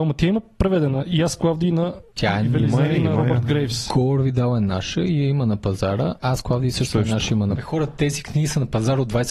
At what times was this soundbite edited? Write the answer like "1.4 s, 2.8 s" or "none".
7.5 s